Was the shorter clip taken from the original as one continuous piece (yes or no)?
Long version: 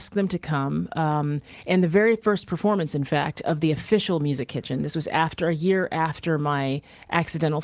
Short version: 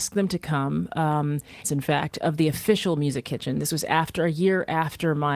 no